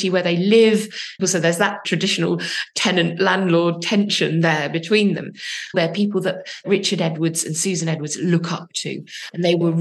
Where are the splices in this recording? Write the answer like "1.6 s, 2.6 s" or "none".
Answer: 1.2 s, 5.7 s